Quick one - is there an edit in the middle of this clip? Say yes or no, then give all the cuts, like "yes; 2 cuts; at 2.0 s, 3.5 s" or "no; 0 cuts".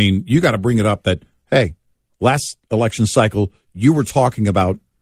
no; 0 cuts